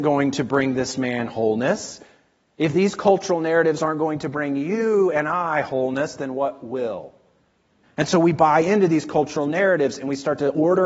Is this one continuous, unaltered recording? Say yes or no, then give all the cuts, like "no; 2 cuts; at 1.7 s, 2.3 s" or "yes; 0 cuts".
no; 1 cut; at 7.8 s